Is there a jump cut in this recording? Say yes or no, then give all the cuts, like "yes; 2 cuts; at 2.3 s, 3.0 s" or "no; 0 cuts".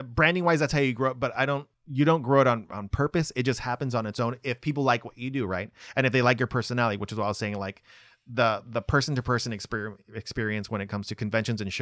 yes; 1 cut; at 1.7 s